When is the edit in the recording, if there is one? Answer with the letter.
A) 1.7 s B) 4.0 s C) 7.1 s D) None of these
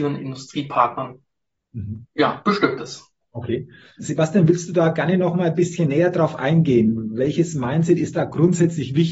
B